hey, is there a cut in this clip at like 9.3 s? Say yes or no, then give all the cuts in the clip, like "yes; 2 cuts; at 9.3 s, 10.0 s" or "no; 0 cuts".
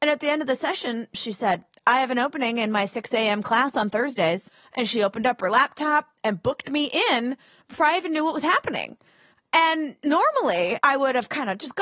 no; 1 cut; at 1.1 s